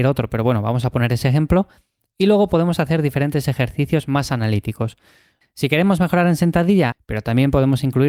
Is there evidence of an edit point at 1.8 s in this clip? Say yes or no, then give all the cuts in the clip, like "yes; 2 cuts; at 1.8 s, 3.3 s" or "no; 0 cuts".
no; 2 cuts; at 5.4 s, 6.9 s